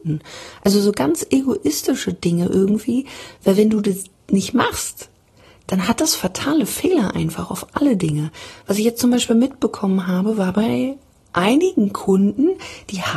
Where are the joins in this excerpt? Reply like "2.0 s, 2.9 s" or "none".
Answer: none